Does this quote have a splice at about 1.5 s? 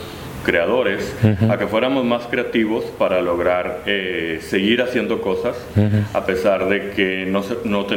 no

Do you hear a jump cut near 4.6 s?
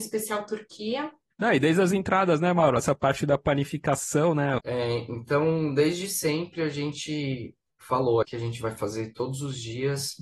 yes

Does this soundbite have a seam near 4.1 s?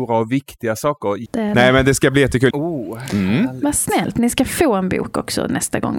no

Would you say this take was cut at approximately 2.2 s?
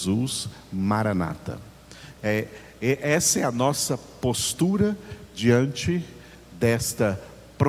yes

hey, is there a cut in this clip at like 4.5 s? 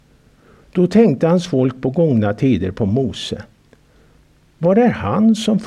no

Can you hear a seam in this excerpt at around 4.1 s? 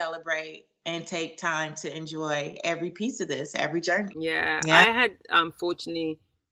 yes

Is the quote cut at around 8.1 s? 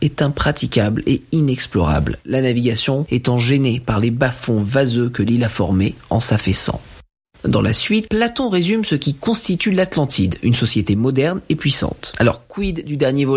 yes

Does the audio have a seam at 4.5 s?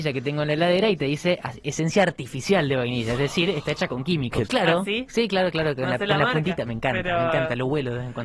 yes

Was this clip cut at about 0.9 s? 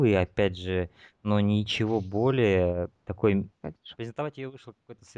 no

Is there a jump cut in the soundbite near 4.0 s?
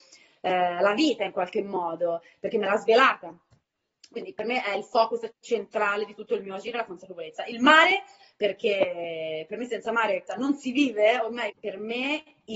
no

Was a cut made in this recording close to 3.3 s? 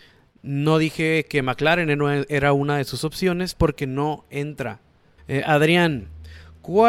no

